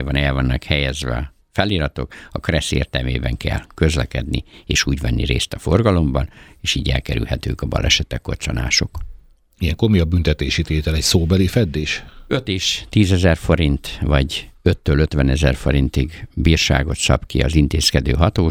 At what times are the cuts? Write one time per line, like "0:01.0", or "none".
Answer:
none